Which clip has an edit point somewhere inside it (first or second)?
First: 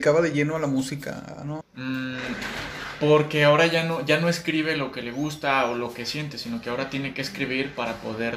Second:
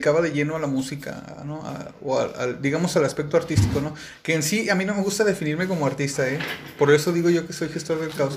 first